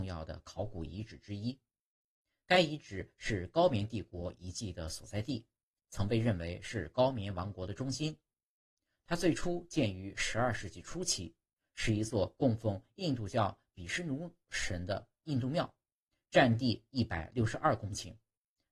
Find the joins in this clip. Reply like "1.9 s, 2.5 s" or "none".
none